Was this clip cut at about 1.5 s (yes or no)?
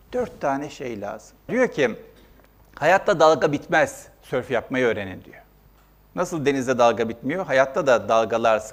yes